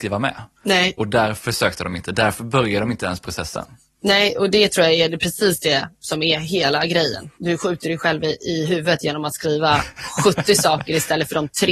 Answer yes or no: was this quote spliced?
yes